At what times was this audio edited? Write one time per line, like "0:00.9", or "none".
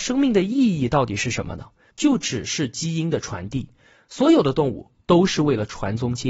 0:01.9
0:04.9